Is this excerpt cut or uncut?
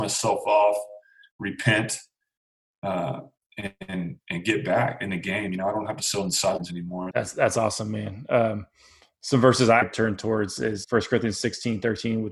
cut